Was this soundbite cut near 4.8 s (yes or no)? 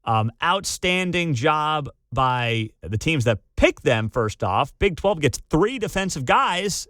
no